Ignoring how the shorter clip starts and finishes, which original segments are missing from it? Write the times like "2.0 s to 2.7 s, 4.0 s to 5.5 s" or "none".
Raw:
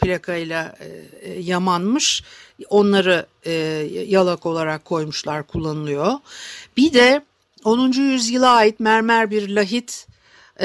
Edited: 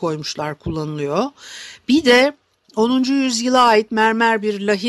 none